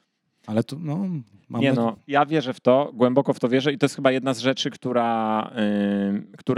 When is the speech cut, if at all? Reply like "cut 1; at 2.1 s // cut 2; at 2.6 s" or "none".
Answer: none